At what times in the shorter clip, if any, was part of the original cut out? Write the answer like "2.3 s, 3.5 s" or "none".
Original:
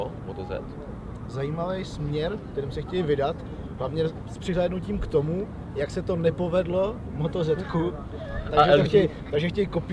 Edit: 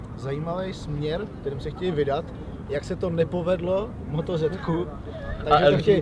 2.7 s